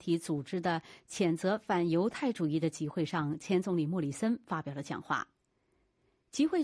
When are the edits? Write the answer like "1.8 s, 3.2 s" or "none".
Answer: none